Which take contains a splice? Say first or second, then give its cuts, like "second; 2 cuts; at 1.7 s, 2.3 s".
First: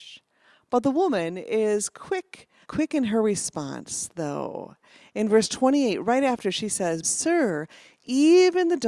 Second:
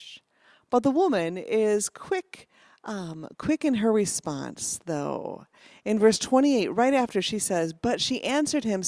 first; 2 cuts; at 2.6 s, 7.0 s